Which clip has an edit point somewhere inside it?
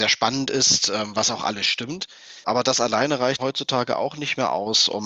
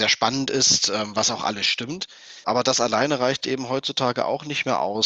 first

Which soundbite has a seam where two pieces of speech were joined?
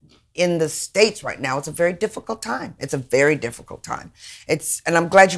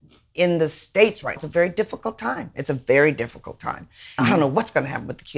second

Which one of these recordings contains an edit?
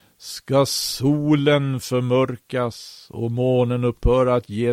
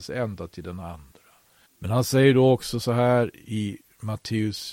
second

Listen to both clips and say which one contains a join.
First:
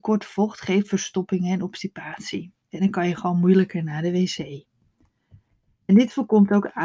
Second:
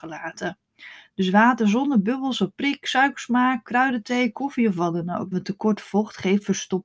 second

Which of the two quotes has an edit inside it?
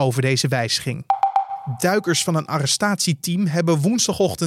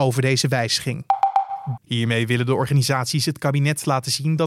second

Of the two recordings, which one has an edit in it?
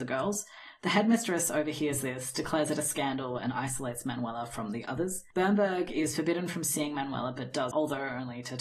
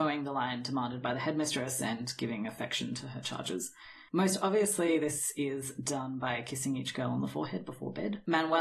first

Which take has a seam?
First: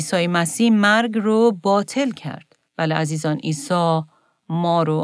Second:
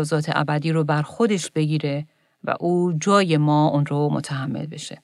first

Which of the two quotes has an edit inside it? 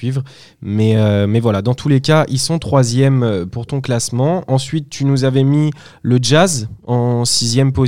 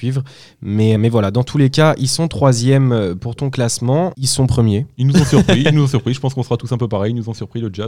second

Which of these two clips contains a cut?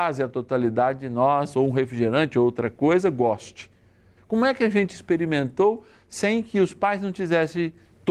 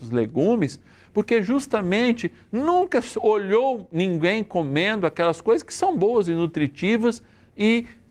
first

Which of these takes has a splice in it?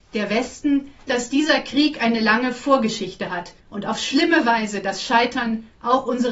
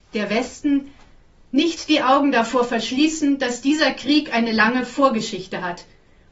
first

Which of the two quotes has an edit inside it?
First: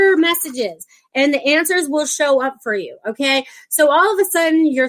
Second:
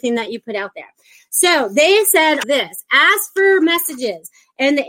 second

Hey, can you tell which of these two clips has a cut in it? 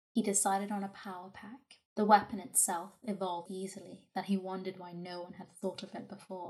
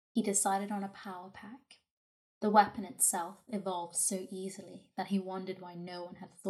first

